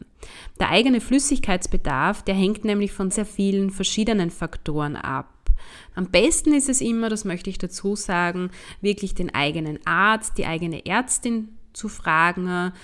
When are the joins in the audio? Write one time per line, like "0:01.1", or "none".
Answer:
0:03.1
0:05.9

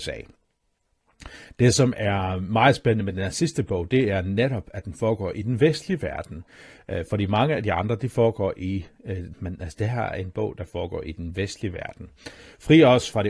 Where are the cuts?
0:09.3

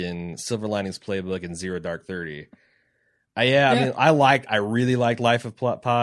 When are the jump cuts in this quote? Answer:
none

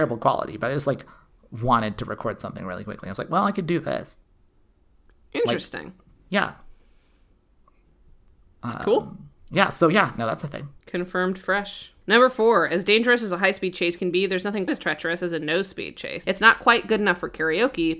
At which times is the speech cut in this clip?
0:09.4
0:14.7
0:16.2

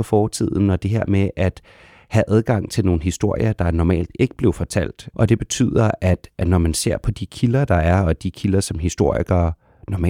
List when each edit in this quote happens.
0:05.1

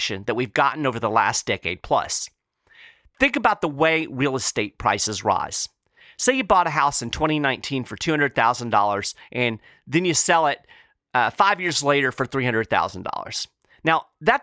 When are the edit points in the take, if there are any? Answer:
none

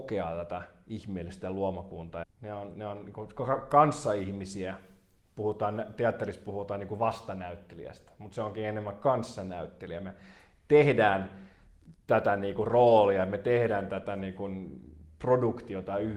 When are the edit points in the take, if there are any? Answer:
0:02.2

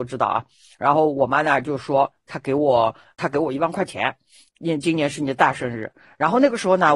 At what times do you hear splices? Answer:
0:04.5

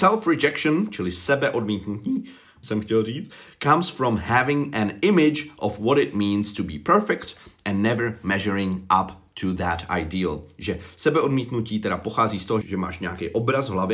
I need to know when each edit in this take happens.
0:02.6
0:12.6

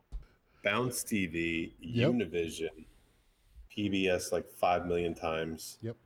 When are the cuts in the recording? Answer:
0:03.7

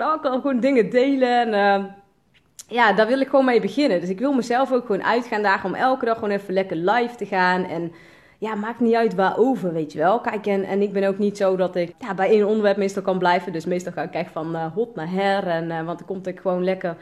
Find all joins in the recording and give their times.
0:11.9

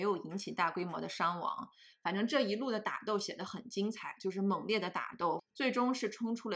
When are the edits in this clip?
0:01.9
0:05.4

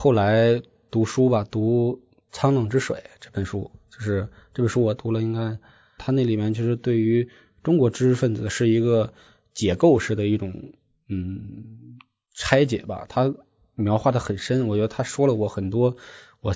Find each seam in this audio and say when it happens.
0:06.0

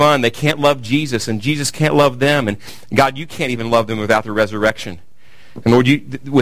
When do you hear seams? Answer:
none

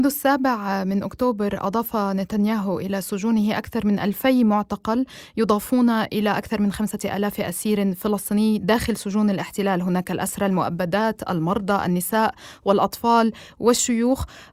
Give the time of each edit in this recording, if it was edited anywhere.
none

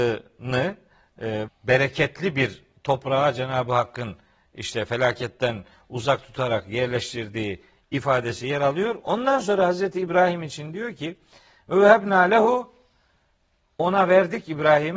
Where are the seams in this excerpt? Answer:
0:01.5

